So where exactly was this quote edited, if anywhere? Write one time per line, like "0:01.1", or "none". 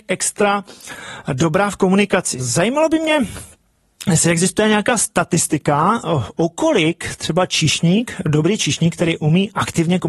0:02.4